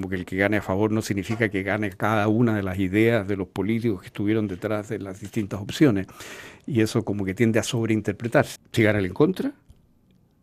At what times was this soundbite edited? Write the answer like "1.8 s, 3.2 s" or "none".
8.6 s